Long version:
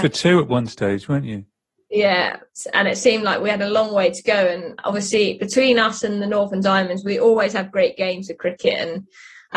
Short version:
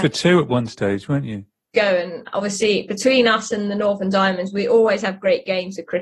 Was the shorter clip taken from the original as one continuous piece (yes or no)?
no